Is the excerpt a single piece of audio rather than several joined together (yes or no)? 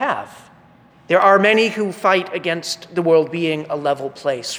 no